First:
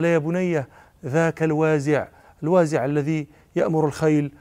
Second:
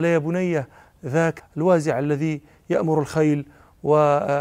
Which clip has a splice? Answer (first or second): second